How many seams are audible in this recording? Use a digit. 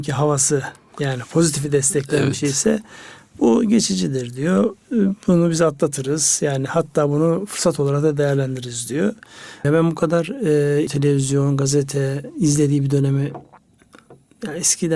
2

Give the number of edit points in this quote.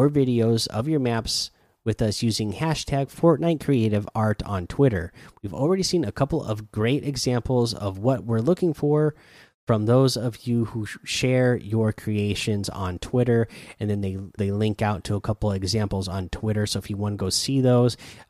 1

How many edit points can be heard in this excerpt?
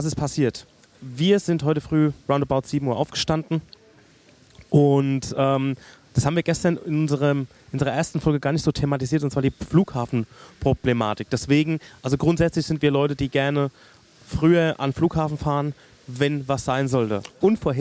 0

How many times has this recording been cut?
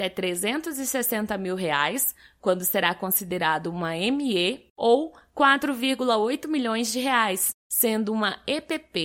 1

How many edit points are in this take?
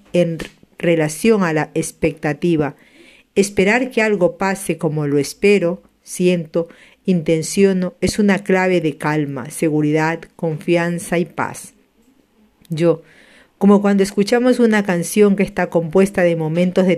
1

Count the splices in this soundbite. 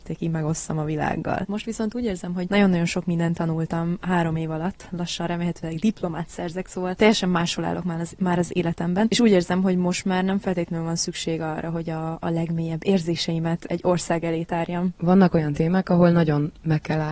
1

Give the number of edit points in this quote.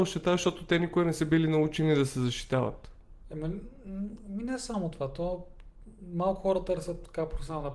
0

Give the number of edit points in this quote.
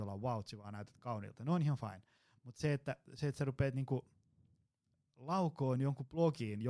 0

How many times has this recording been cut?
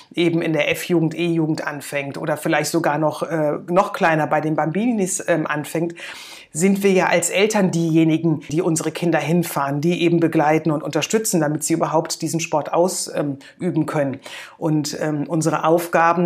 1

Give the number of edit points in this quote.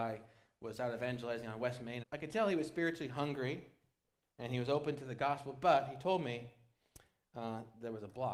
1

